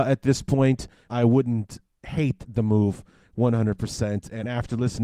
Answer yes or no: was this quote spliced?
yes